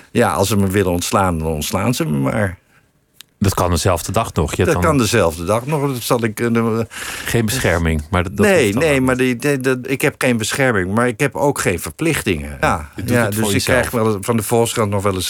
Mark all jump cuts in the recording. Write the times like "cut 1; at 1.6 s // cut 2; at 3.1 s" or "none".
cut 1; at 9.8 s // cut 2; at 12.6 s